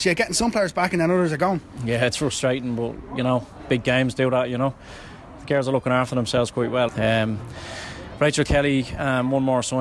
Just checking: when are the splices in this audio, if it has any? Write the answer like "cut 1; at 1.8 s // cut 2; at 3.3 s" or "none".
cut 1; at 6.9 s